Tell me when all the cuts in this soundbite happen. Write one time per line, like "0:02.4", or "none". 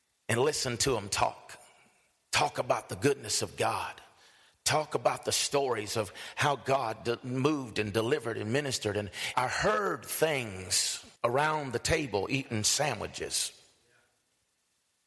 0:09.3
0:11.2